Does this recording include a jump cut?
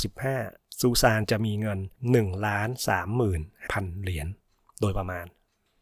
yes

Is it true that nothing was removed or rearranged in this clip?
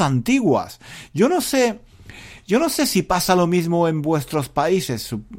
yes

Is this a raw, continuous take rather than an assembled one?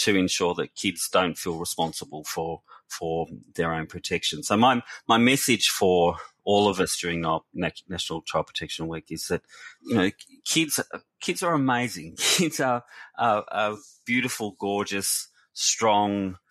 yes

